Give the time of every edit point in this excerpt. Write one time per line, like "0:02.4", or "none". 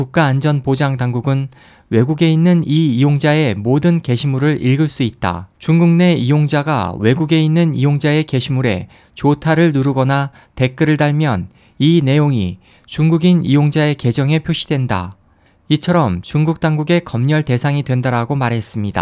0:05.5

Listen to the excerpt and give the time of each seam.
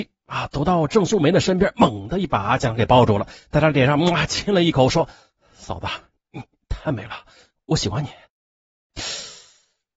none

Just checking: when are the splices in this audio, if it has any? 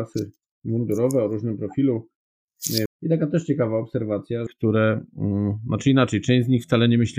0:02.9
0:04.5

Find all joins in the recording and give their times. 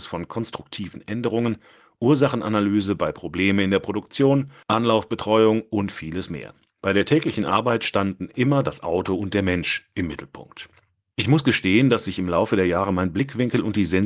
0:04.6

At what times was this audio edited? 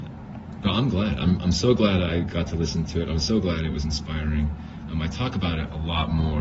none

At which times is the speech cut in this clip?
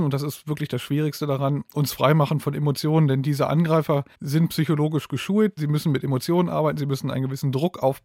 0:04.1
0:05.6

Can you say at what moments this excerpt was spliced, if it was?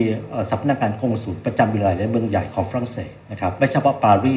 0:03.2

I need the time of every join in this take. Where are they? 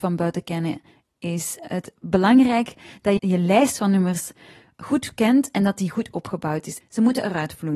0:03.2
0:06.8

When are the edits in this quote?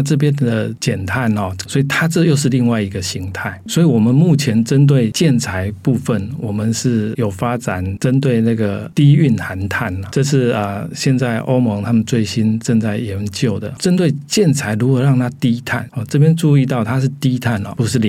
0:01.6

